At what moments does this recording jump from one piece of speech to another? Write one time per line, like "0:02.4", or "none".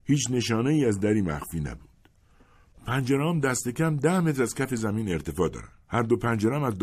0:05.8